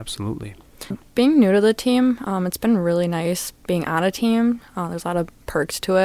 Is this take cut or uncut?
cut